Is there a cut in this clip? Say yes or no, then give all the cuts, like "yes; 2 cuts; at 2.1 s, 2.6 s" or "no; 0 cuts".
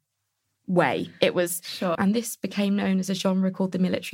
yes; 1 cut; at 1.9 s